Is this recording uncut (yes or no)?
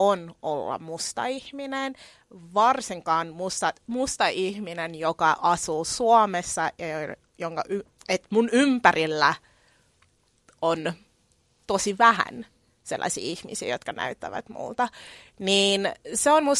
yes